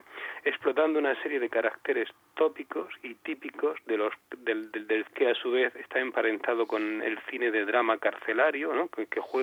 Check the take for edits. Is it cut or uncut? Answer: cut